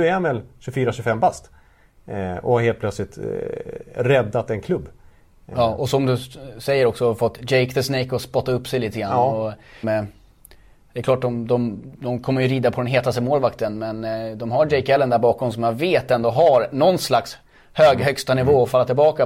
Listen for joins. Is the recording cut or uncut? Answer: cut